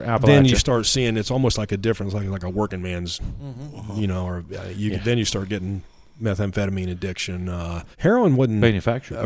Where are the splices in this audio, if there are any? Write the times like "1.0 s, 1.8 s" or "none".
7.9 s